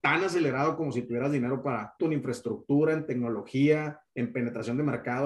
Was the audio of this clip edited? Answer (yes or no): yes